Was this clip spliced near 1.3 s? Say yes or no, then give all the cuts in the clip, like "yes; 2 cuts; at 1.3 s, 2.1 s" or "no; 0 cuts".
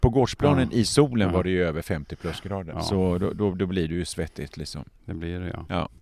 no; 1 cut; at 2.7 s